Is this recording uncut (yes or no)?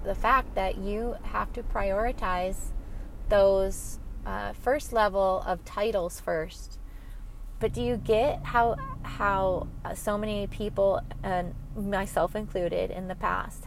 no